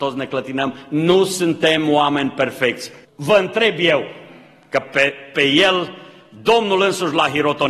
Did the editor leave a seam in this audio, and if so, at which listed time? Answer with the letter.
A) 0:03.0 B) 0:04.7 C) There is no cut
A